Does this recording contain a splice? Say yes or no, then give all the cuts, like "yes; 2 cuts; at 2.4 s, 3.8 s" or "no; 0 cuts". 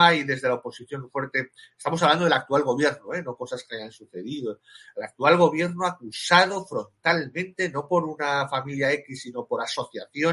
no; 0 cuts